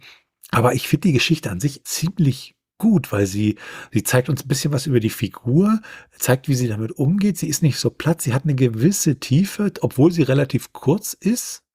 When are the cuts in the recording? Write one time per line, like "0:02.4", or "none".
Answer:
0:01.8